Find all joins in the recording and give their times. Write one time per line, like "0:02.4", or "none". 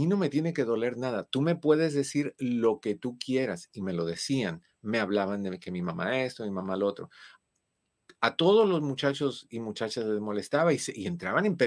none